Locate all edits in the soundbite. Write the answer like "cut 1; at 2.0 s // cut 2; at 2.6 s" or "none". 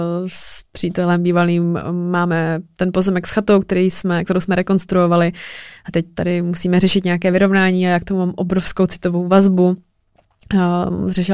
none